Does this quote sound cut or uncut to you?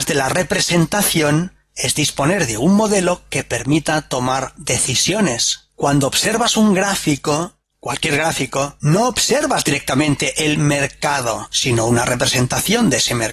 uncut